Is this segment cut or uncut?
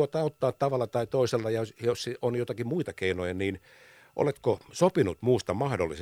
uncut